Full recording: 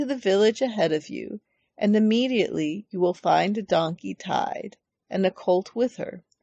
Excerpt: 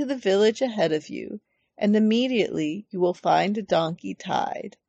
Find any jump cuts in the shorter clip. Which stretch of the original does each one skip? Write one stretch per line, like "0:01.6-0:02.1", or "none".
none